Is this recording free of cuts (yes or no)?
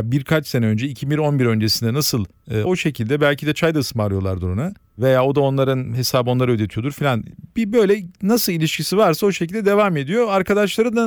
no